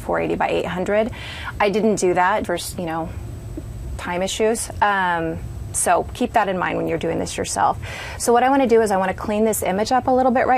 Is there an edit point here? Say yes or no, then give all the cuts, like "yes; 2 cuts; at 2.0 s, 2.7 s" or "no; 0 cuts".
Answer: yes; 1 cut; at 2.4 s